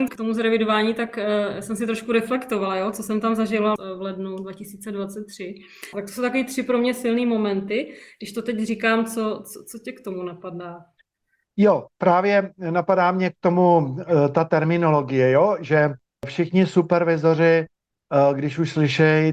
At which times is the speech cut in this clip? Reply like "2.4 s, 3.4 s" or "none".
5.9 s